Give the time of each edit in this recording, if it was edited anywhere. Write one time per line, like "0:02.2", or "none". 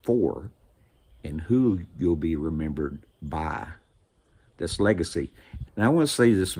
0:05.6

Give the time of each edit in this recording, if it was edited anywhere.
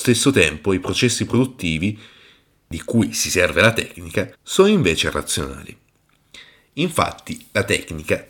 0:04.3

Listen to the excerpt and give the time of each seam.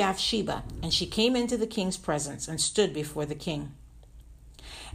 none

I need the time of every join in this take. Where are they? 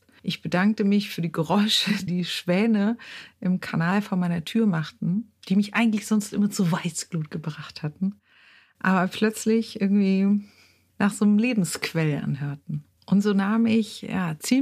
0:02.1
0:13.0

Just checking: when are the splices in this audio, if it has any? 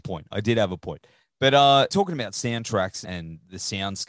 0:01.9
0:03.0

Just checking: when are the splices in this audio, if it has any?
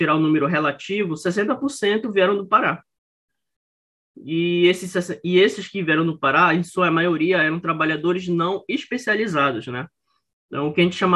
none

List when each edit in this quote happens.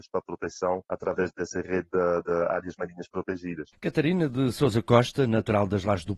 0:01.3
0:03.7

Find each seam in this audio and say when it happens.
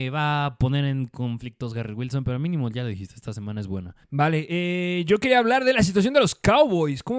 0:04.0

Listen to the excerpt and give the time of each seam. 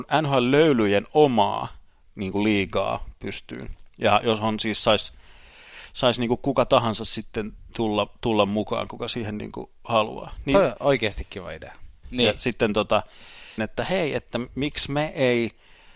0:12.0
0:13.6

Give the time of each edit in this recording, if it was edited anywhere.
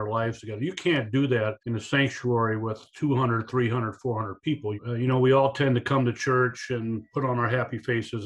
0:01.6
0:04.8

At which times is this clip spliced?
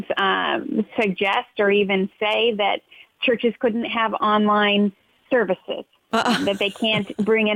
none

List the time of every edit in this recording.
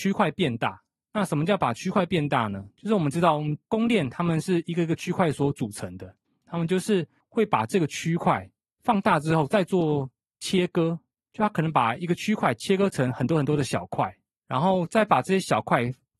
0:03.6
0:06.4

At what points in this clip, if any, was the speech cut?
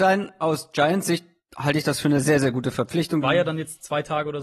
0:03.2

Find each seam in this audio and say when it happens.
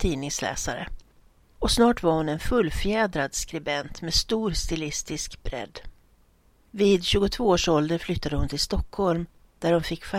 0:01.4

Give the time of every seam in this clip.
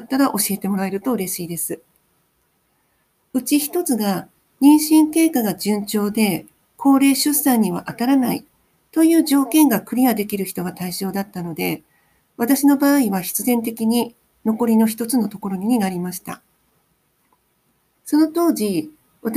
0:03.2

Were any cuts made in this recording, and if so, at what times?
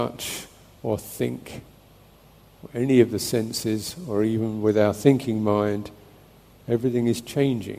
none

